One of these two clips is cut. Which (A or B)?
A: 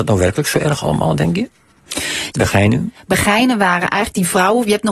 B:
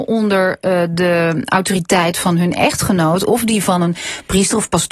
A